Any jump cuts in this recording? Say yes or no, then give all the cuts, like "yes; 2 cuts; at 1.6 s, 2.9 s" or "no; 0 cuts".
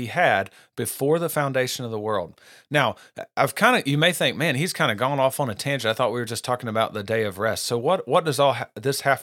no; 0 cuts